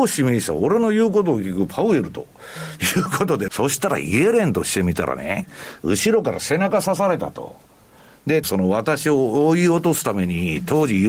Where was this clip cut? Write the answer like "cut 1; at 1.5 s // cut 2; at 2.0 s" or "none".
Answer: cut 1; at 3.5 s // cut 2; at 8.4 s